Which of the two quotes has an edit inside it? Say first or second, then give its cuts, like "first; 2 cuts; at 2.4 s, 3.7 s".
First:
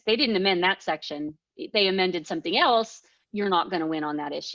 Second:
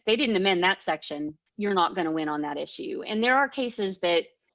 second; 1 cut; at 1.5 s